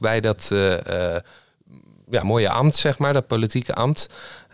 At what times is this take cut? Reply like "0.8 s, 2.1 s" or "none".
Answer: 2.2 s